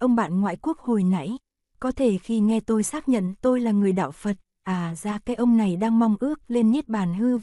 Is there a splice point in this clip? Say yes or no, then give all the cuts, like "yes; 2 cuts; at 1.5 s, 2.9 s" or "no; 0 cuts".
yes; 1 cut; at 4.5 s